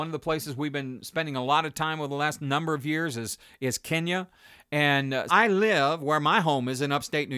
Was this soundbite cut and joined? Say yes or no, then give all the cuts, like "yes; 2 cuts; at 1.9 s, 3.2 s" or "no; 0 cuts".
yes; 1 cut; at 5.3 s